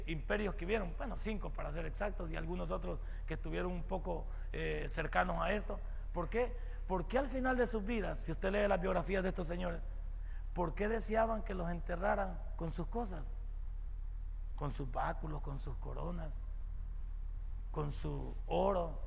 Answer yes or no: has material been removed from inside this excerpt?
no